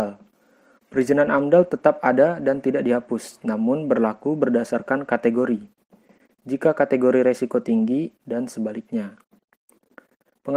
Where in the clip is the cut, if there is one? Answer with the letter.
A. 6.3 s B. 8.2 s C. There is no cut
B